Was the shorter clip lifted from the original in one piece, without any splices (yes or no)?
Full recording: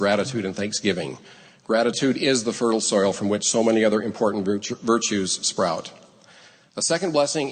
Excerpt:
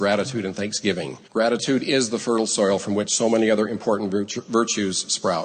no